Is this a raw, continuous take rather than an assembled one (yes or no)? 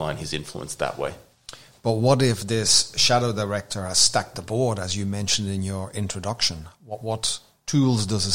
yes